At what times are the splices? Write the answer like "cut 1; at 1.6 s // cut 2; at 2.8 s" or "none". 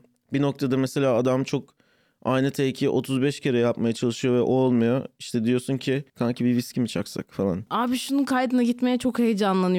cut 1; at 6.1 s // cut 2; at 7.7 s